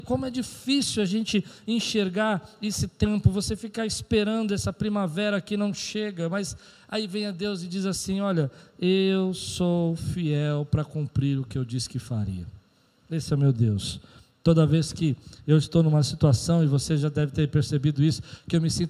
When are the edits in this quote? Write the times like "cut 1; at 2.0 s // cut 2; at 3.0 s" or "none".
none

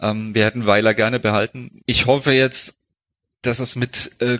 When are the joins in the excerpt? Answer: cut 1; at 1.8 s

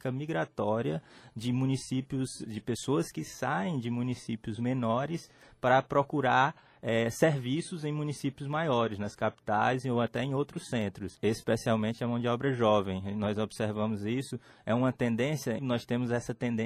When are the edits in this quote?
cut 1; at 11.2 s // cut 2; at 15.6 s

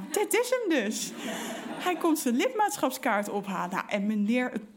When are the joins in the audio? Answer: none

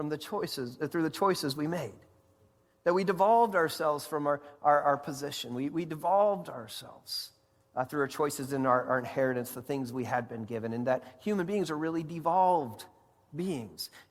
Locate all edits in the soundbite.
none

